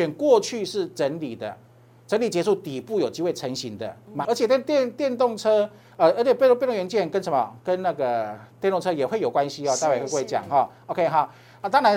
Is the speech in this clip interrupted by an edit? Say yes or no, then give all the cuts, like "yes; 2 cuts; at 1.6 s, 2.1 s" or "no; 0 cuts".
yes; 1 cut; at 4.2 s